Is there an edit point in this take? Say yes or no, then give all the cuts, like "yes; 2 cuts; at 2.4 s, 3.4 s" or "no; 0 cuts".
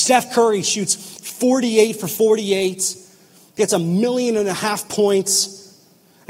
no; 0 cuts